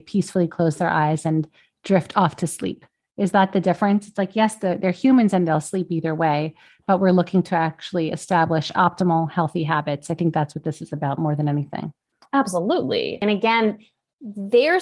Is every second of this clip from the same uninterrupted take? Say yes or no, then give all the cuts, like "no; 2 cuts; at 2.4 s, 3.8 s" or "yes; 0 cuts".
yes; 0 cuts